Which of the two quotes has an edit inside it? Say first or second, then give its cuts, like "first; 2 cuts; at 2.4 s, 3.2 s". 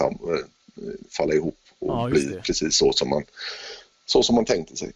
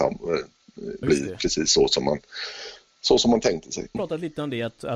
second; 2 cuts; at 1.0 s, 3.9 s